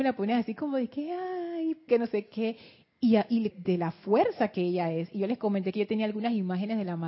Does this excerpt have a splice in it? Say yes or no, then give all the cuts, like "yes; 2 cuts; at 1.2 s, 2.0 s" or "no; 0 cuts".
yes; 2 cuts; at 1.9 s, 3.5 s